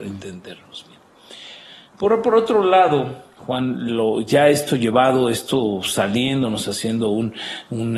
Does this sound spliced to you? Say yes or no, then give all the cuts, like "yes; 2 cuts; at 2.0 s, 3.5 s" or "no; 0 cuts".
no; 0 cuts